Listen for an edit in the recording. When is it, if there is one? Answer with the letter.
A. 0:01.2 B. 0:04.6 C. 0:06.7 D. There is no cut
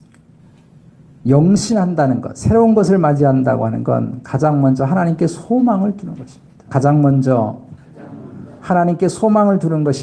C